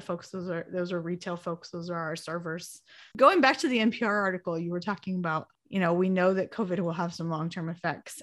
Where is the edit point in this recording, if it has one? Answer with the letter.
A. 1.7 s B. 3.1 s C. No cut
B